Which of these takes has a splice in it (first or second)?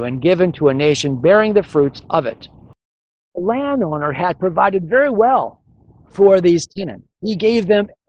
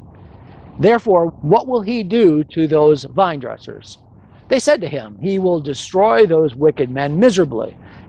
second